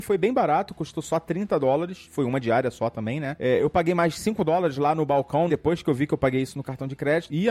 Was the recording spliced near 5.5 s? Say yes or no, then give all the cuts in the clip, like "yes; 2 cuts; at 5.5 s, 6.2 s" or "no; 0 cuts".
yes; 1 cut; at 5.5 s